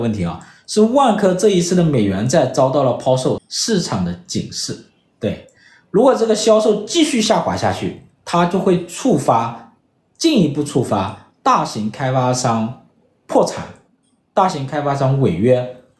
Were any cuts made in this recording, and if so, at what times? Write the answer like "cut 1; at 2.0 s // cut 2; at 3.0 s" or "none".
cut 1; at 3.4 s